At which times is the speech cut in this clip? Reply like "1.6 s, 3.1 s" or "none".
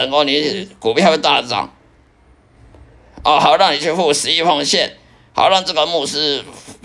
none

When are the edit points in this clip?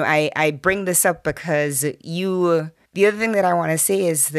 2.8 s

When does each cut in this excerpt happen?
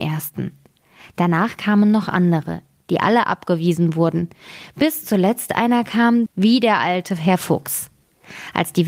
2.8 s, 6.3 s

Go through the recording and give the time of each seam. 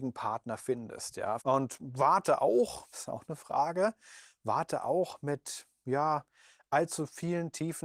1.4 s, 2.9 s

